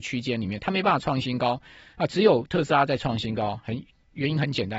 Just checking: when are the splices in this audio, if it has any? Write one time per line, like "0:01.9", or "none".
none

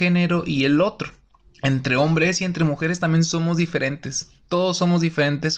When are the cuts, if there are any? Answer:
none

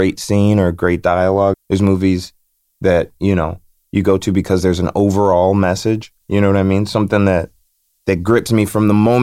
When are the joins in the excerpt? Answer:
0:01.5
0:06.2

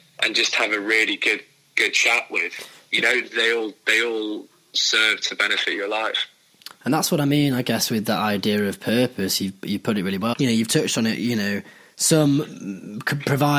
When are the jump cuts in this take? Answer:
0:10.3

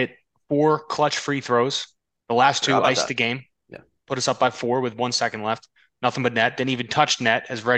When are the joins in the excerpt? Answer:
none

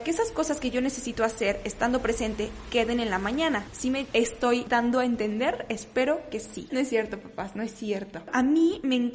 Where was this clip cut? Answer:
0:06.7

